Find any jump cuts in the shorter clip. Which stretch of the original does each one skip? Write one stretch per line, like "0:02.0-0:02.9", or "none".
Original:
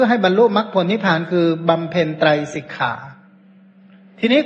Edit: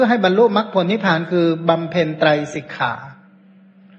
none